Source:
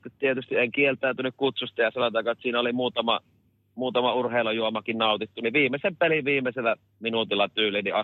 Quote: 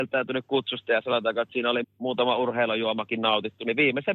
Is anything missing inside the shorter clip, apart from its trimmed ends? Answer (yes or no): yes